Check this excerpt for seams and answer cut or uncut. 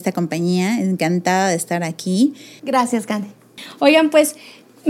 cut